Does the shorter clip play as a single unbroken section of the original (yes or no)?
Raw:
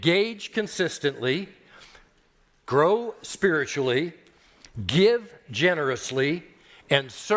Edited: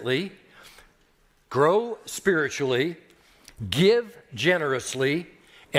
yes